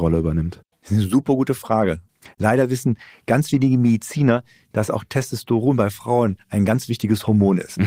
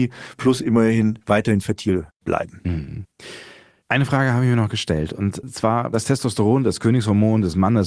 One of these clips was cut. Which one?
second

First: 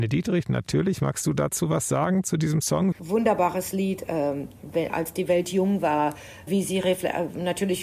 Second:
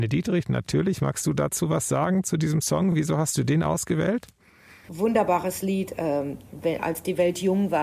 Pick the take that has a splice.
first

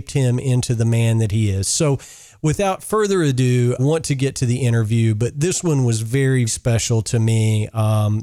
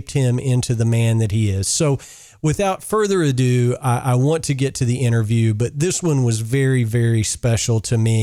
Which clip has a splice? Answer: first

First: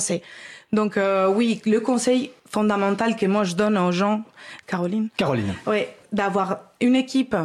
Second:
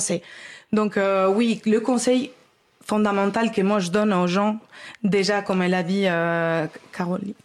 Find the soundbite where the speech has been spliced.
first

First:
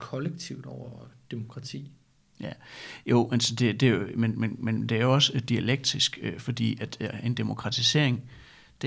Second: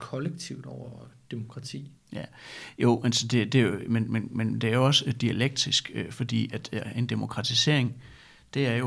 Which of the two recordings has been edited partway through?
second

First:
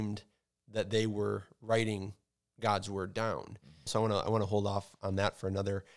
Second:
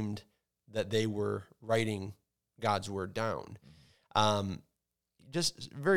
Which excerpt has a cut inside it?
first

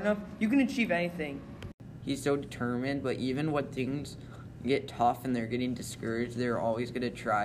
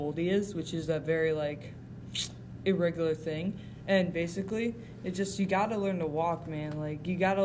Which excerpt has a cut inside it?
first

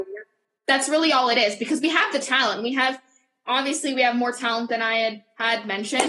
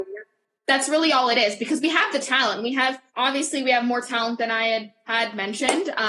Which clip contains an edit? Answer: second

